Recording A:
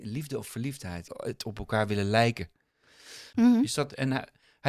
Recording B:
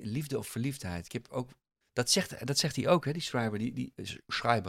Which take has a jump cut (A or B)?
A